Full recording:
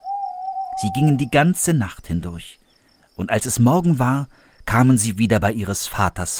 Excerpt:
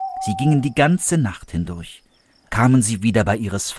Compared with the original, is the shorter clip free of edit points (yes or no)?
no